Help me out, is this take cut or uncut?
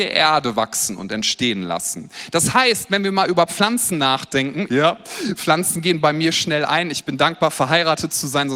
cut